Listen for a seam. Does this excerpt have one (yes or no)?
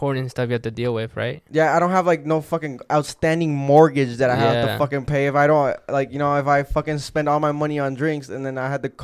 no